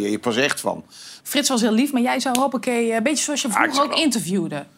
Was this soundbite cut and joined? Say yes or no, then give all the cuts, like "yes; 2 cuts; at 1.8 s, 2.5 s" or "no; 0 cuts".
yes; 1 cut; at 1.2 s